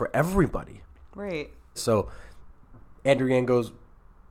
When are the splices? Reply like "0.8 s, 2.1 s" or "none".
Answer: 1.7 s

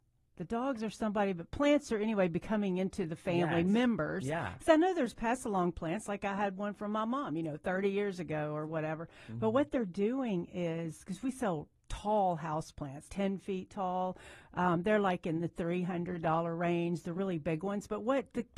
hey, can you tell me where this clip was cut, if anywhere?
13.1 s

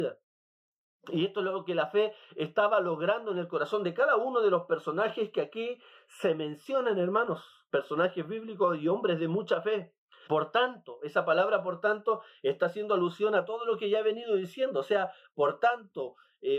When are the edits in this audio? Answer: 10.3 s

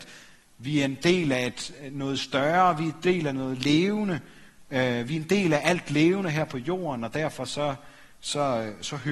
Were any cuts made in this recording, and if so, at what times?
none

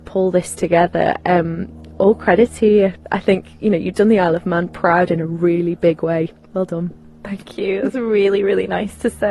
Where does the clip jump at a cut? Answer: none

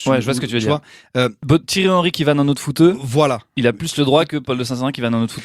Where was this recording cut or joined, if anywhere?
none

